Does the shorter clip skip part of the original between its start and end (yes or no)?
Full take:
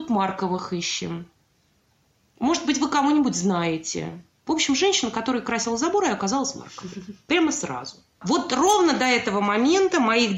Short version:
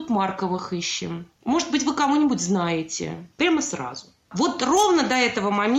yes